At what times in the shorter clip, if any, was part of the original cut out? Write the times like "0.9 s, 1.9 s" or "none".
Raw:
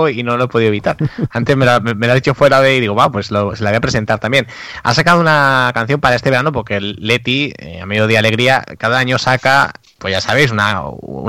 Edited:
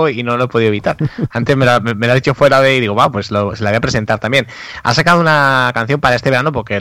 none